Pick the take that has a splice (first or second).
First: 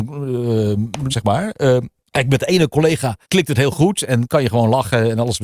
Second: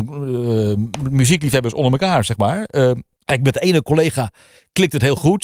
first